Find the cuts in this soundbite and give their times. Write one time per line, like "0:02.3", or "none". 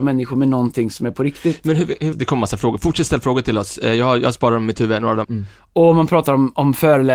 0:02.1
0:05.2